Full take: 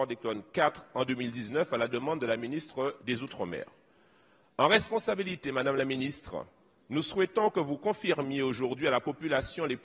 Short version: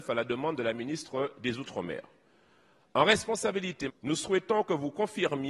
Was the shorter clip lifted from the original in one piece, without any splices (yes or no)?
no